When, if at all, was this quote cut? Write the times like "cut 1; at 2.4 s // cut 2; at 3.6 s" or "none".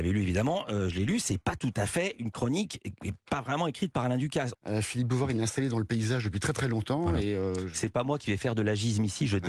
cut 1; at 4.5 s